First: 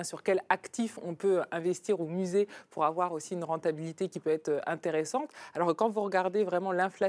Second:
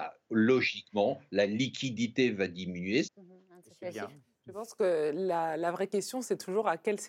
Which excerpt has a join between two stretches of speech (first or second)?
second